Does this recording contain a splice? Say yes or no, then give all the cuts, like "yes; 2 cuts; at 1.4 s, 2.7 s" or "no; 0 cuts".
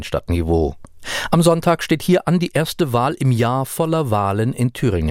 no; 0 cuts